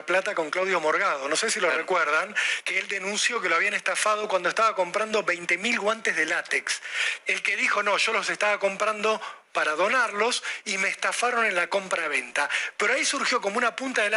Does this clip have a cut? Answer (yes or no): yes